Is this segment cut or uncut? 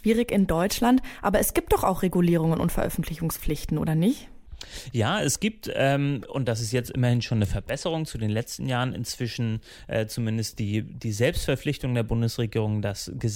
uncut